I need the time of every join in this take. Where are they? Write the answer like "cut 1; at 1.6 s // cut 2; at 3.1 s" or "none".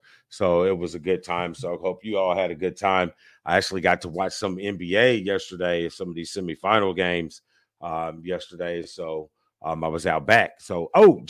none